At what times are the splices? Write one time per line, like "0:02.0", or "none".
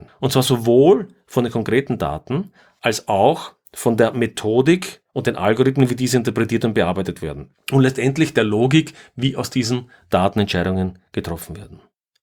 none